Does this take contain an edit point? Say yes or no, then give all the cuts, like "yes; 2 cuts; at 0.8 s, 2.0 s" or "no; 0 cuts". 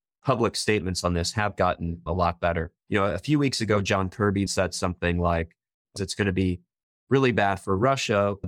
yes; 3 cuts; at 2.8 s, 4.5 s, 6.0 s